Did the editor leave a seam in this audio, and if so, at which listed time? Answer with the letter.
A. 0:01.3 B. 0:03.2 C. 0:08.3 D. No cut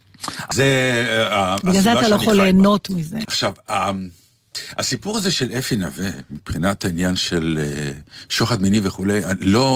B